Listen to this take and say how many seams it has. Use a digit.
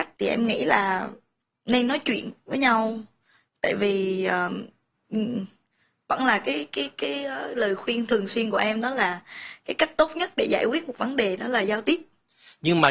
0